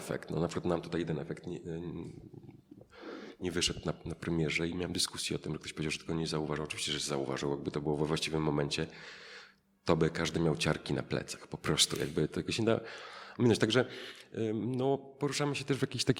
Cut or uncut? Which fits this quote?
uncut